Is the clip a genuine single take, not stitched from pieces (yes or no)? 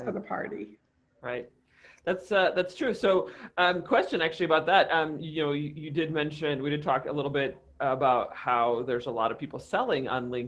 yes